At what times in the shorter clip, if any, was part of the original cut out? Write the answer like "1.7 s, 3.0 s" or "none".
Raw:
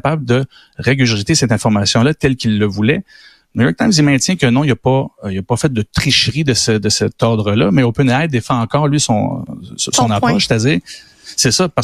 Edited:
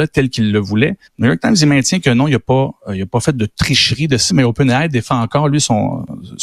1.1 s, 4.3 s